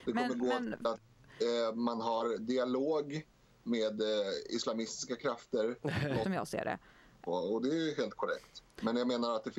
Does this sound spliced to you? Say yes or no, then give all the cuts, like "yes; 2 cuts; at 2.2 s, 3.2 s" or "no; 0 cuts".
yes; 2 cuts; at 6.2 s, 7.3 s